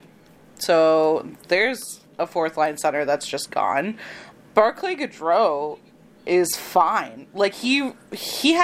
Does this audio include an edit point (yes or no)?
no